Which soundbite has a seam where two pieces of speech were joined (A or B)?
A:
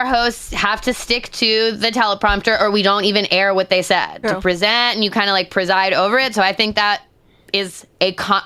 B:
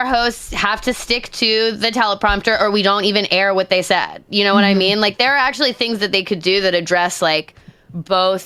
A